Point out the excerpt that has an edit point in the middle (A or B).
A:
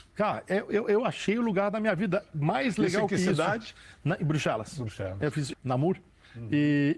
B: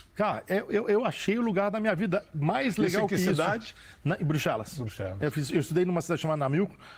A